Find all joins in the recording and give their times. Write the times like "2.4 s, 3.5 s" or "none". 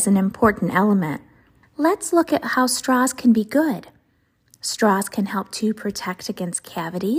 1.6 s